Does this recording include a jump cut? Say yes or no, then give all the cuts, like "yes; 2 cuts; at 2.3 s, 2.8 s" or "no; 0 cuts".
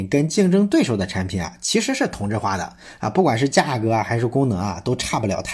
no; 0 cuts